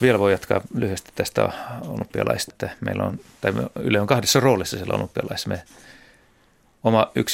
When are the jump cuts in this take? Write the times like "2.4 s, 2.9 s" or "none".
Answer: 2.5 s